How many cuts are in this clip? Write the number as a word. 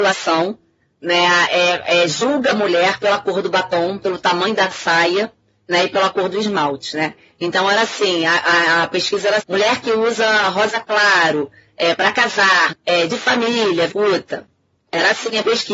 three